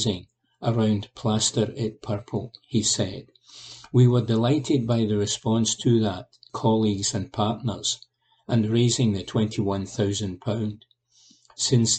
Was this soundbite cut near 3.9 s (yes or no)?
no